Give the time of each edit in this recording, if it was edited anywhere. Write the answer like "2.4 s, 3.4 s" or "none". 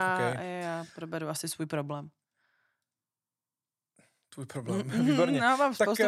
none

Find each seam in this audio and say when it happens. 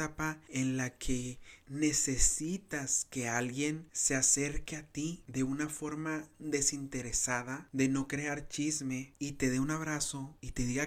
1.6 s

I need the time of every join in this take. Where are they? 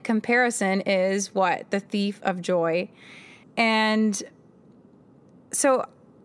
3.4 s

